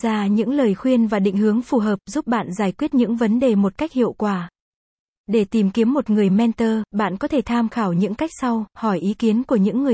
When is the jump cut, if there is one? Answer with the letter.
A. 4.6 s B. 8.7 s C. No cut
C